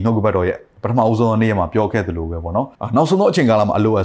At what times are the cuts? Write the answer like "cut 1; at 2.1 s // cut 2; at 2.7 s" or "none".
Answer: cut 1; at 2.8 s